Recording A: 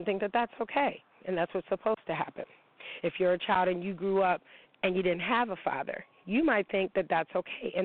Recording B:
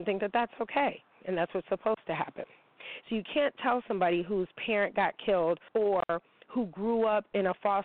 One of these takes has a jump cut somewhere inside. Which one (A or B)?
B